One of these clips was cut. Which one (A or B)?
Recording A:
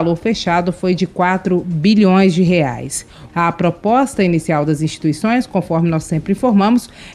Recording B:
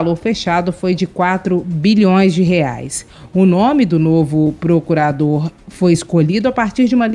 A